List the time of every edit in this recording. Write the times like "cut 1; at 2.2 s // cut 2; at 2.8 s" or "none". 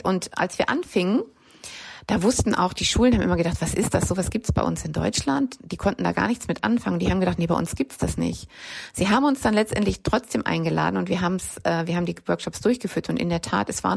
none